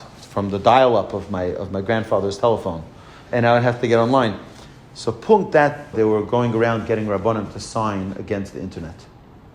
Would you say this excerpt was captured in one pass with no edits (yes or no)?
no